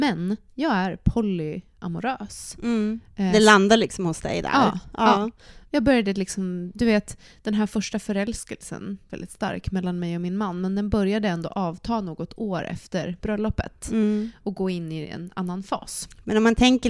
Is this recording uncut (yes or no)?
no